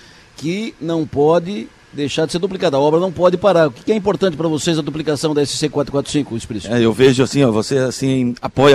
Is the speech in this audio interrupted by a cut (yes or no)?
no